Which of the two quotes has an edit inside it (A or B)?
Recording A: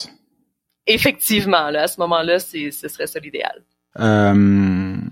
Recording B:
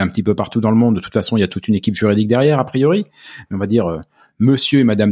A